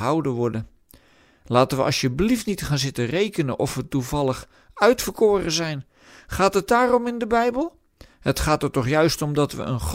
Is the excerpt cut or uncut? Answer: uncut